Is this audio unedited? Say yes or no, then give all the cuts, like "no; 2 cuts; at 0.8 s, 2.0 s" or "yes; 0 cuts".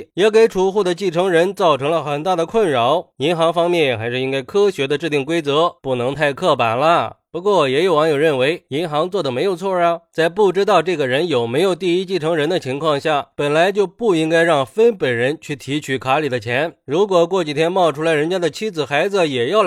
no; 1 cut; at 5.8 s